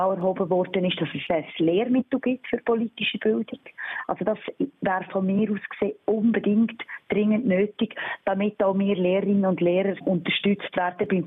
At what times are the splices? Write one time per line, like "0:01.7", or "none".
none